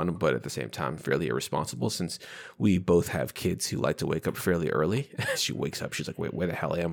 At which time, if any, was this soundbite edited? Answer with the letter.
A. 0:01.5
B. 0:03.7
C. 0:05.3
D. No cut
C